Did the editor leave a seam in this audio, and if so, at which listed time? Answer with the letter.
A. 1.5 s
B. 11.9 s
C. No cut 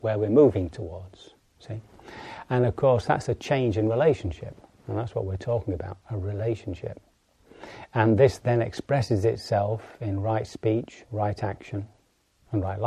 C